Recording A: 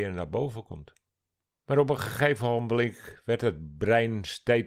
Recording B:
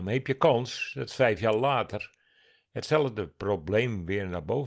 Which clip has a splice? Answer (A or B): A